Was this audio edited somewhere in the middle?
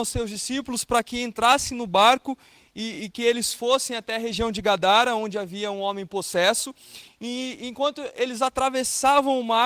no; 0 cuts

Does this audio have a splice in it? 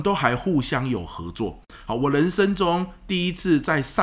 no; 0 cuts

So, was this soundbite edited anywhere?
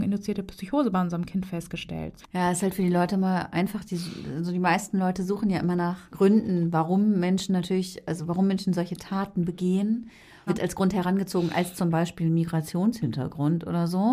yes; 2 cuts; at 2.2 s, 10.5 s

